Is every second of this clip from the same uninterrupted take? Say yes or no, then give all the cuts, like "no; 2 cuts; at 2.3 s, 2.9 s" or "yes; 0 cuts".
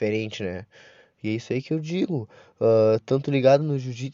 yes; 0 cuts